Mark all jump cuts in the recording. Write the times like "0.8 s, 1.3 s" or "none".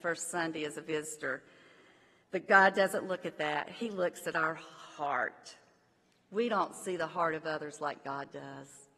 none